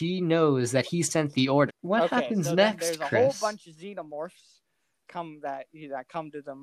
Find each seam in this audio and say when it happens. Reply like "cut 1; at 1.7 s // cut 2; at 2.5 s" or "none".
cut 1; at 1.7 s